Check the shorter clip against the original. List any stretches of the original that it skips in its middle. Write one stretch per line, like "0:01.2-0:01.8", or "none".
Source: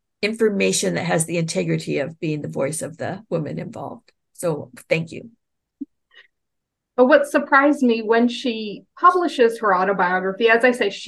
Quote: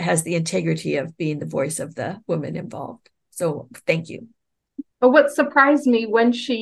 0:05.9-0:06.9